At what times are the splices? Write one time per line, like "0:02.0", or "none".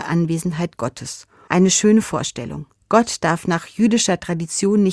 0:01.5
0:02.8

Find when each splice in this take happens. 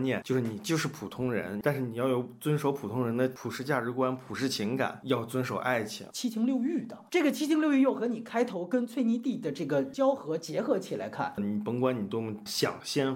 0:01.6
0:06.1
0:11.4

